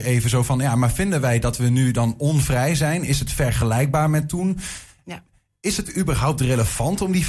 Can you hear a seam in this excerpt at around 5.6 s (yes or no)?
no